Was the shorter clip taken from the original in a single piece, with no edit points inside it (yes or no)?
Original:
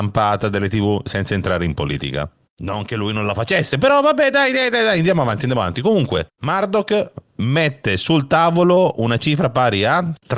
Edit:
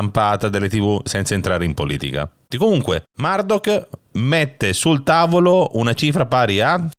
no